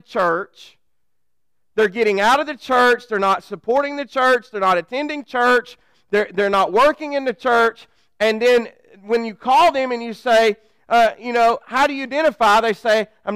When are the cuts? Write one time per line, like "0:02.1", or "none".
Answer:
none